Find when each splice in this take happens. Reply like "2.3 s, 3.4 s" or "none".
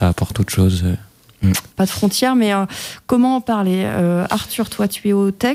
1.7 s